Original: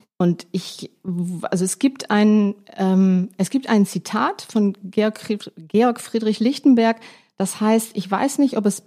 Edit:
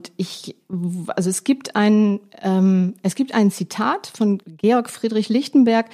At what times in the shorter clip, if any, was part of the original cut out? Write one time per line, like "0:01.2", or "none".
0:04.4